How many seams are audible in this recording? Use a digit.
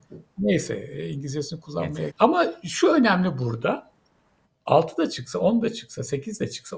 1